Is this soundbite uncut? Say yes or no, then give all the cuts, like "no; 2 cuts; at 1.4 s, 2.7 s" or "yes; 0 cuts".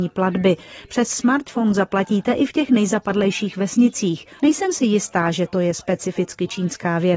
no; 1 cut; at 4.4 s